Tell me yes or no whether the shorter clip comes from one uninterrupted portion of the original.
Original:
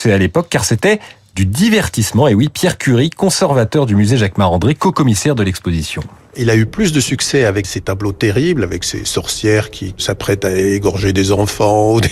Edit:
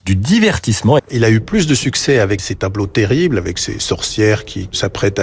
no